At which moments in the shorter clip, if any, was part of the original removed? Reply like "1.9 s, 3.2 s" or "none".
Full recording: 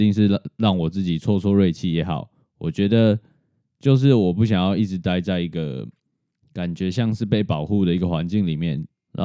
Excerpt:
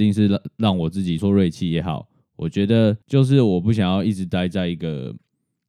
1.2 s, 3.0 s